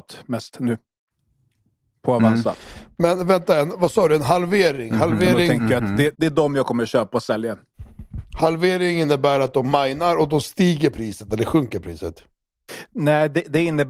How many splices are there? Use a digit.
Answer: 1